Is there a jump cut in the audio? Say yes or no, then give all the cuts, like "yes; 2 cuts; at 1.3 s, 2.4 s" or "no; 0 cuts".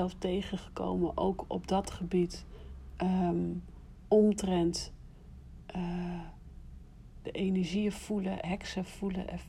yes; 2 cuts; at 7.2 s, 8.4 s